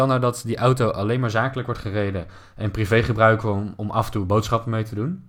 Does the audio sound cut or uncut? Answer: uncut